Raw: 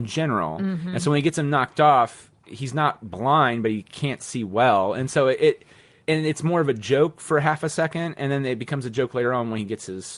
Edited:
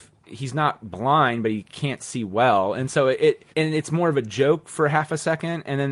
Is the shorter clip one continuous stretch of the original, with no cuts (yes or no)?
no